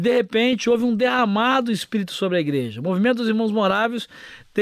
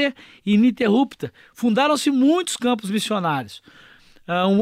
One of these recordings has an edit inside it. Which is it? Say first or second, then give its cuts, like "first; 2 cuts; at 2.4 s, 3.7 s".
second; 1 cut; at 1.5 s